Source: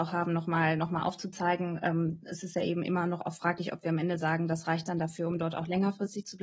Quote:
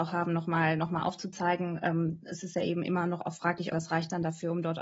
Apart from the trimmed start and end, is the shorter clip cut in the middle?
yes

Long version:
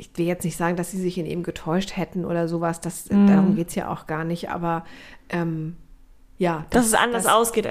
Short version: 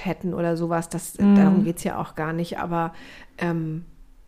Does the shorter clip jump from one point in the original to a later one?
no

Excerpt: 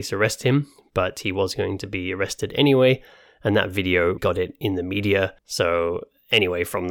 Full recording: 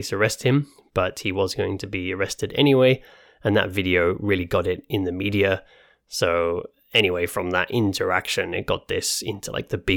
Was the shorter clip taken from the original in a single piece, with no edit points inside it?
no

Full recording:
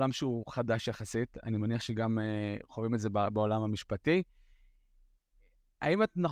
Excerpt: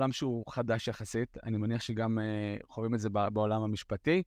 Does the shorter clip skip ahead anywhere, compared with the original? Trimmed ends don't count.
no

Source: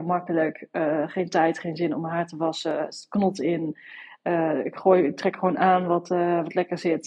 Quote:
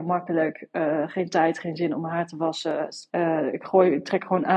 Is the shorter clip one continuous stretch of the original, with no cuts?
no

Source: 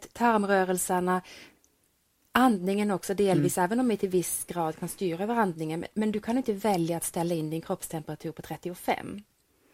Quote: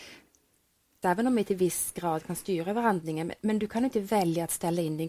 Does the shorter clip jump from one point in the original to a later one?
yes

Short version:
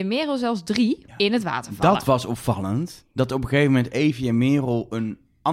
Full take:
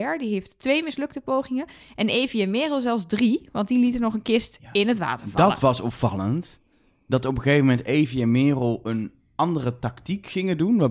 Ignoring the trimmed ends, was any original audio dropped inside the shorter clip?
yes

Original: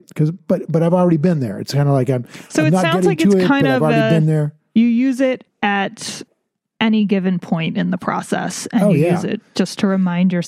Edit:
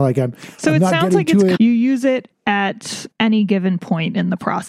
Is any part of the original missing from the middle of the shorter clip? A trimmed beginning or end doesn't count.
yes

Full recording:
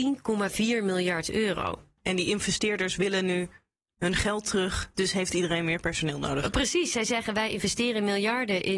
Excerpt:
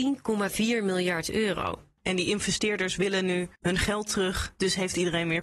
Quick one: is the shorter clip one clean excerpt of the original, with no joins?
no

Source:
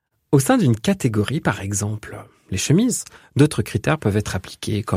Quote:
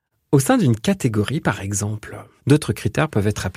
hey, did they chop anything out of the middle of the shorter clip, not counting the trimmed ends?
yes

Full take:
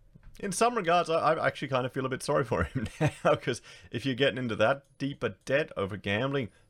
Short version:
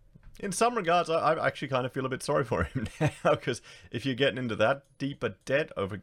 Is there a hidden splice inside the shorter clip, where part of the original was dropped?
no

